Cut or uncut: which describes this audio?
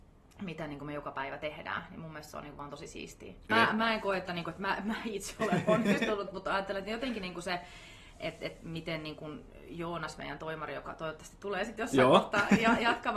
cut